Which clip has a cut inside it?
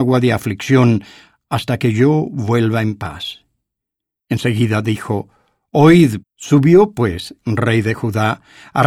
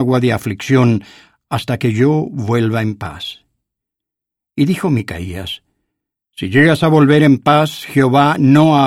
first; 3 cuts; at 4.2 s, 6.2 s, 7.4 s

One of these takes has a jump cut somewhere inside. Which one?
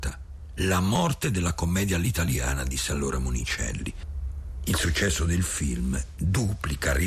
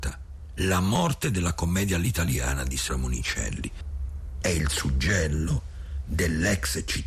second; 2 cuts; at 2.9 s, 4.4 s

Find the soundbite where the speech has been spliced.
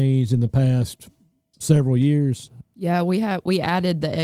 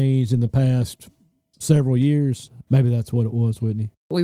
second; 1 cut; at 2.7 s

